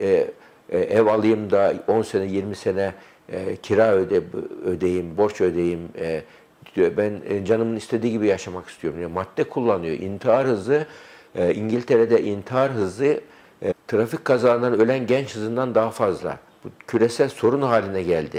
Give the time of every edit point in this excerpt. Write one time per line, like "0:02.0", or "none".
0:13.7